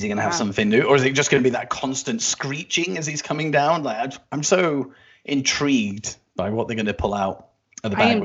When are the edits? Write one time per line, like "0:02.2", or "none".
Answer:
0:04.4